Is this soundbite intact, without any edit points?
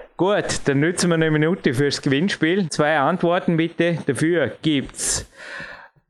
no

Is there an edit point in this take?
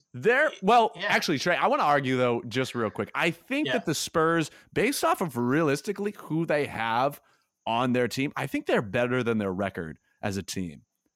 no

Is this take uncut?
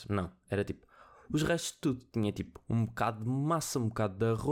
yes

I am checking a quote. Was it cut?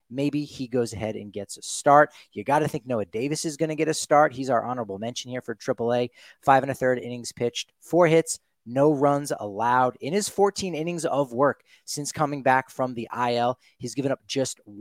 no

